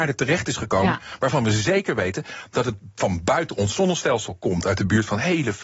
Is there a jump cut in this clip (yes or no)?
no